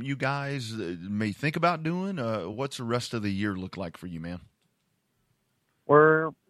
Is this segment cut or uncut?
uncut